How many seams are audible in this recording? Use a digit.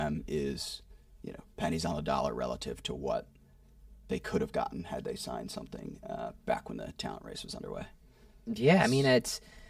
0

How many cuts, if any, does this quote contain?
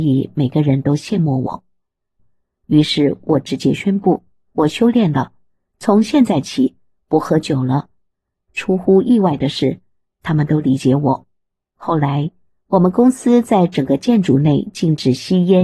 1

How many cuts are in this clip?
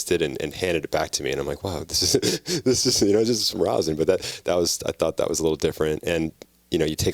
0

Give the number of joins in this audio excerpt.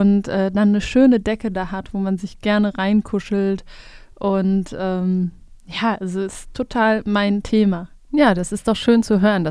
0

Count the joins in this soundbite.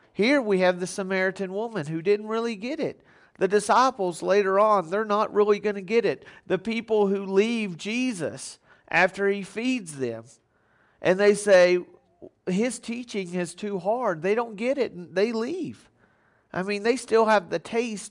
0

